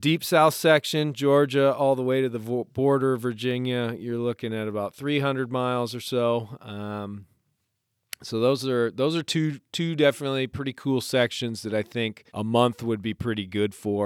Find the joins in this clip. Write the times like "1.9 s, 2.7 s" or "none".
12.3 s